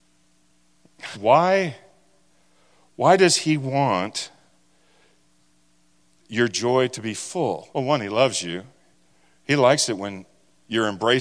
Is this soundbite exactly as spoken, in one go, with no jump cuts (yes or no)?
no